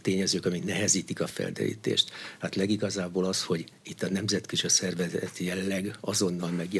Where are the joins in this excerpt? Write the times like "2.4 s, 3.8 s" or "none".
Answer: none

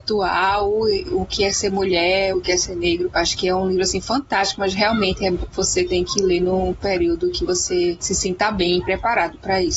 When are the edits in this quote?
2.3 s

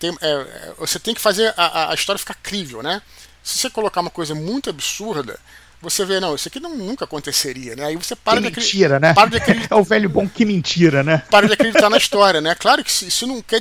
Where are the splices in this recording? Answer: none

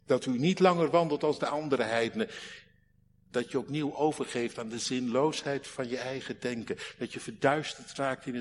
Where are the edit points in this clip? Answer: none

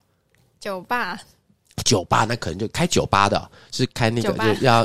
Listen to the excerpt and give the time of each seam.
none

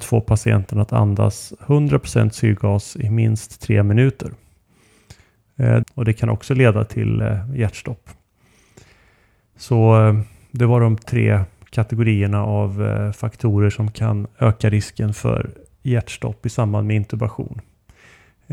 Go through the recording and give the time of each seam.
5.8 s

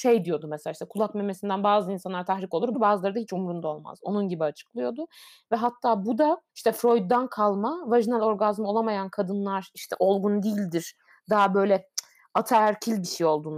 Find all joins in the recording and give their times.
2.7 s, 6.5 s

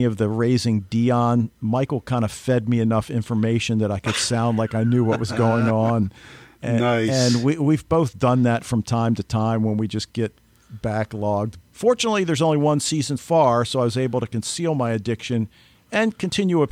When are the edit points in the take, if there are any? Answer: 11.6 s, 13.2 s

